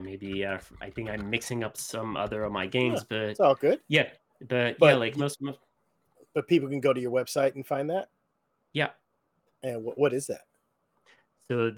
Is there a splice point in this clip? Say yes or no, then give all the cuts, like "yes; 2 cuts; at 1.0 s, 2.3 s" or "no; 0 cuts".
no; 0 cuts